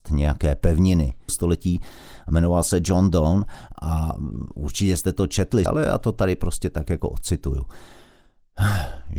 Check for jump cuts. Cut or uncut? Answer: cut